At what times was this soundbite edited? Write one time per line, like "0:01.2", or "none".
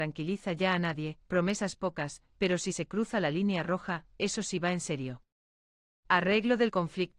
none